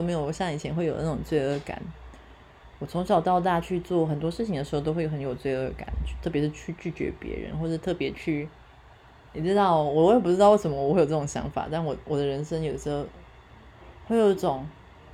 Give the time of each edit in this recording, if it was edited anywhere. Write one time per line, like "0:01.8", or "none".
none